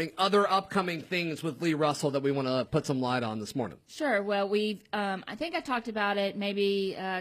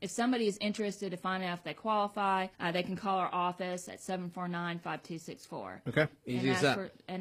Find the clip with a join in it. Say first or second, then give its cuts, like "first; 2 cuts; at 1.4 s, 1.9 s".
second; 1 cut; at 2.5 s